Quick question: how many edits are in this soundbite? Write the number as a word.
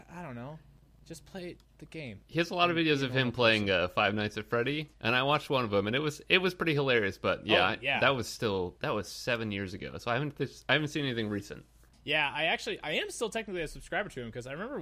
zero